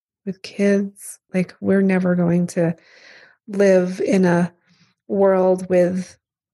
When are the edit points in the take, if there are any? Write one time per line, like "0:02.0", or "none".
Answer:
0:01.3